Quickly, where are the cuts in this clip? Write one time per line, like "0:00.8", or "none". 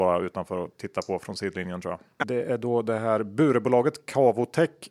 0:02.2